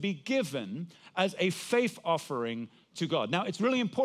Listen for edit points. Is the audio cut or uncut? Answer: uncut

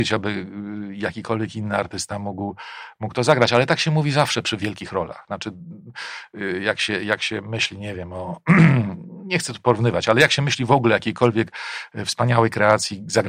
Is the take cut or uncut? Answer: uncut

